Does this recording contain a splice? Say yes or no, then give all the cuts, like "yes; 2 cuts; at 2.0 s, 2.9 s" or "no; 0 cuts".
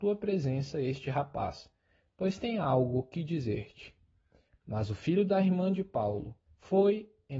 yes; 2 cuts; at 4.5 s, 6.5 s